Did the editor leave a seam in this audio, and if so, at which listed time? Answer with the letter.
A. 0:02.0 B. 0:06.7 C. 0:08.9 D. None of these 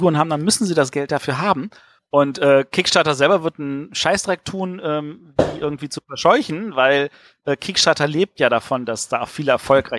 A